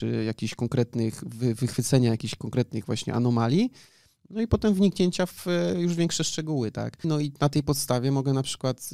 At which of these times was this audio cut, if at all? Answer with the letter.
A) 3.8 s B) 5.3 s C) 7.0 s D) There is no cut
C